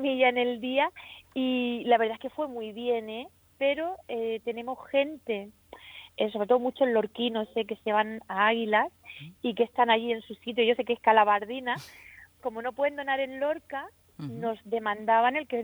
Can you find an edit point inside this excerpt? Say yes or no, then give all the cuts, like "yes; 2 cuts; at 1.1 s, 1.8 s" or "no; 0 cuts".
yes; 1 cut; at 12.4 s